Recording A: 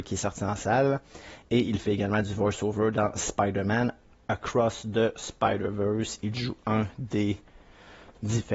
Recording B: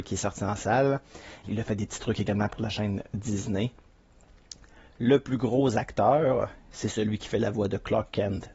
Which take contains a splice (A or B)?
B